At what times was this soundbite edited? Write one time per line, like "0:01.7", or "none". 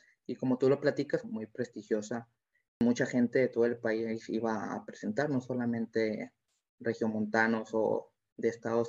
0:01.2